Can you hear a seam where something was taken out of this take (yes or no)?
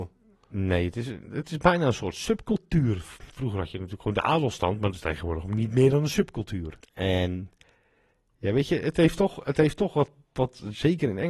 yes